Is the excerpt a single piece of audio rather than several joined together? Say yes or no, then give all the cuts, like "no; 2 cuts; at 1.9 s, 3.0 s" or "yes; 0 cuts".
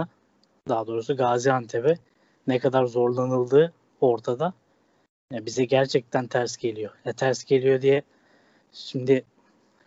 yes; 0 cuts